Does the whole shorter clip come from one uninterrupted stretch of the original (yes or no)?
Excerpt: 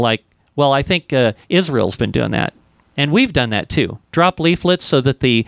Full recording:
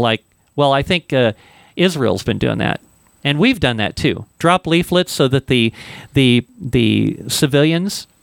no